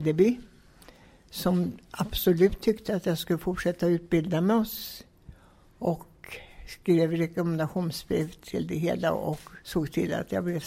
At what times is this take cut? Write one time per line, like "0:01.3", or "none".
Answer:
0:09.6